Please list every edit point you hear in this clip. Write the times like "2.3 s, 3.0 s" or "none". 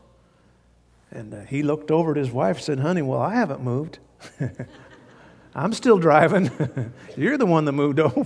none